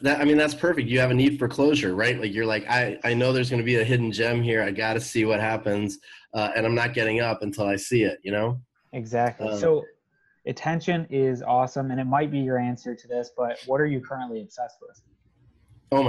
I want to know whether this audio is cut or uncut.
uncut